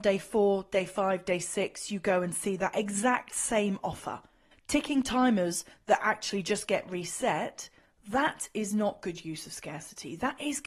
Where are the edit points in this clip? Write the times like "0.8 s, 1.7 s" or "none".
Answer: 4.5 s